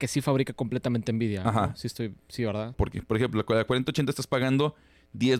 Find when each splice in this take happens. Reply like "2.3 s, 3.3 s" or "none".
2.7 s